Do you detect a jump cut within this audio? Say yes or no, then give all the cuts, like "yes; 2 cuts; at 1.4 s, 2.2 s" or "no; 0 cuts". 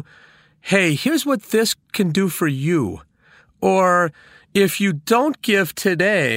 no; 0 cuts